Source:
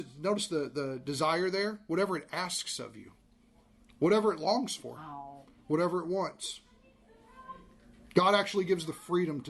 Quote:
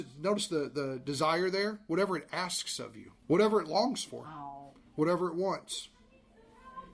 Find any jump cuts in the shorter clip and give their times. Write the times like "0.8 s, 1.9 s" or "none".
3.2 s